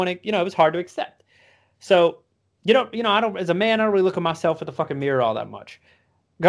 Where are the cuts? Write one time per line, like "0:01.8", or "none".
none